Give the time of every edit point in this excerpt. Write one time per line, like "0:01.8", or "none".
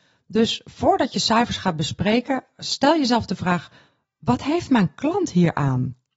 none